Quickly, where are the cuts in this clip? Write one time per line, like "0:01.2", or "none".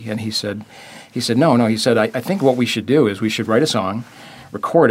none